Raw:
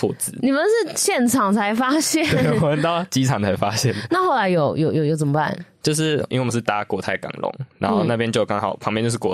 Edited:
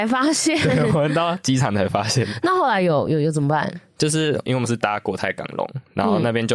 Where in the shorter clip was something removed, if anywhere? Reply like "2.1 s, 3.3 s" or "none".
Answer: 3.1 s

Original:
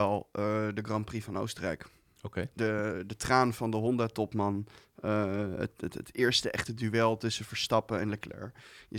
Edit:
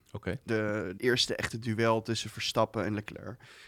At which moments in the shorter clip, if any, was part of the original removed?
1.0 s

